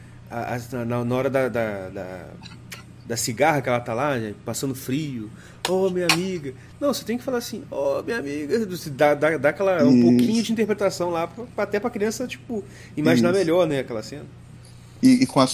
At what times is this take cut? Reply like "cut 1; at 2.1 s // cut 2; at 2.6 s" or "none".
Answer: none